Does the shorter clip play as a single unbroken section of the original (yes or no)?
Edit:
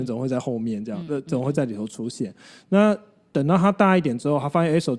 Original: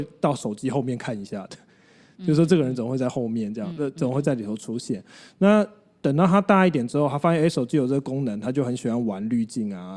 yes